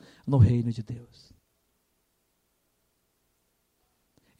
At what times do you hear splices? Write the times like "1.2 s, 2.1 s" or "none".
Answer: none